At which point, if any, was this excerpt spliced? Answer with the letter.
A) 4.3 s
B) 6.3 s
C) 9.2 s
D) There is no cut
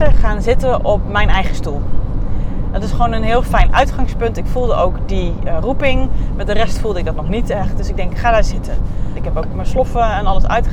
C